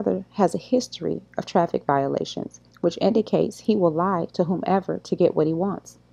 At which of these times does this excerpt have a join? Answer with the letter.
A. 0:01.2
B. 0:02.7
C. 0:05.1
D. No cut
B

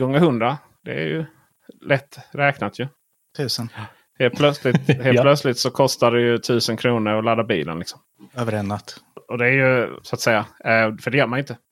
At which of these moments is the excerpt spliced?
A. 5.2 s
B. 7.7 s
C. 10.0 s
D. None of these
C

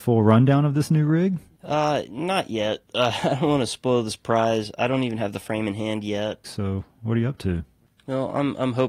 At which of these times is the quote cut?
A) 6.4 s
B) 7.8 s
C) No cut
A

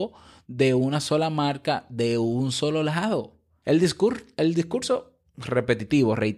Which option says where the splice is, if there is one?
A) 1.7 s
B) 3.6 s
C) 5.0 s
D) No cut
B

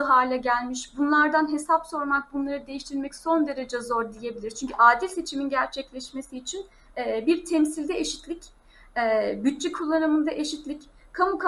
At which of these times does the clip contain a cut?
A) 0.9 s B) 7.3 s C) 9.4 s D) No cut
D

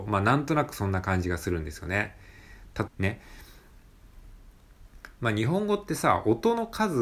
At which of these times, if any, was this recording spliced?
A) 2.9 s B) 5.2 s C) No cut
A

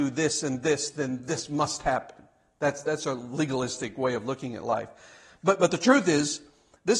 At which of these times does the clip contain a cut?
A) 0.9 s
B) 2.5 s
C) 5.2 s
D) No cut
D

